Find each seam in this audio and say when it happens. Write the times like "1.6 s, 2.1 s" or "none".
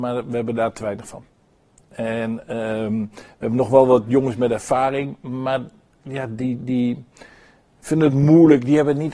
none